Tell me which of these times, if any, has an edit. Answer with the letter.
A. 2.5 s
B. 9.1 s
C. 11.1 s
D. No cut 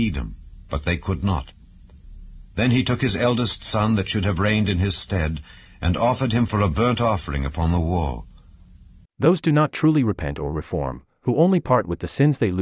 B